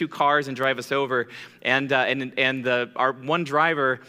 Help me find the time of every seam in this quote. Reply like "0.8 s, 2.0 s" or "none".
none